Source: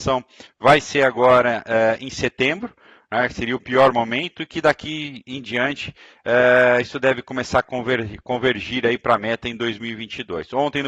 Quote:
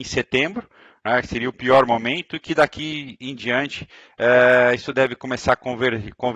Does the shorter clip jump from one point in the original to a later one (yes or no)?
no